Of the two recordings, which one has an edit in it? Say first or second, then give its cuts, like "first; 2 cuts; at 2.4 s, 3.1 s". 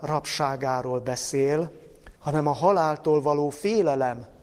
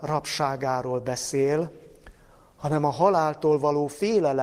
first; 1 cut; at 2.2 s